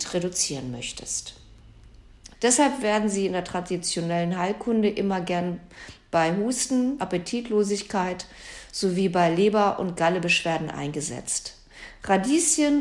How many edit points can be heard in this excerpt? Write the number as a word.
two